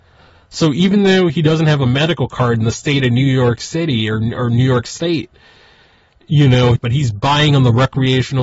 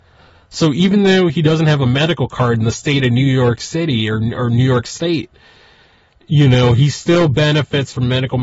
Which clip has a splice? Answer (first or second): first